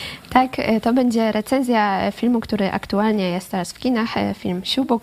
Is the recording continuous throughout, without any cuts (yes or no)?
yes